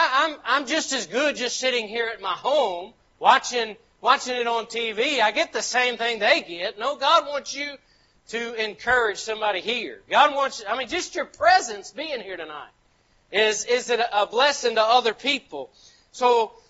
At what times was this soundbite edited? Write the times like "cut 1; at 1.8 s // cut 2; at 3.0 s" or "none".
none